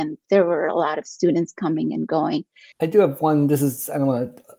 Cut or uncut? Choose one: cut